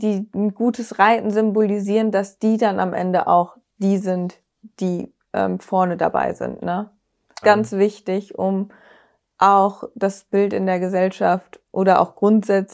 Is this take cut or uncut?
cut